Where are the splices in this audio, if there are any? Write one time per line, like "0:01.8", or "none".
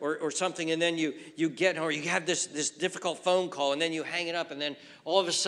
none